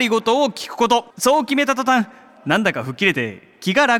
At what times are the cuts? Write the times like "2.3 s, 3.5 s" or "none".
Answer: 1.1 s